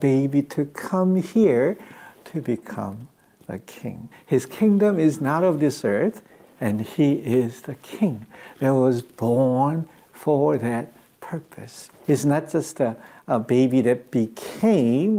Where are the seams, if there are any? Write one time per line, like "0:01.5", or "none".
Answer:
0:04.1
0:12.0